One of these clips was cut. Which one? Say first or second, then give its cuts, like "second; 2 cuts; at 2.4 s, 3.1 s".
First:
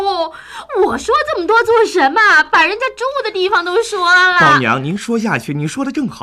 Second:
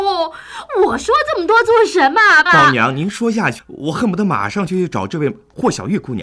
second; 2 cuts; at 2.5 s, 3.6 s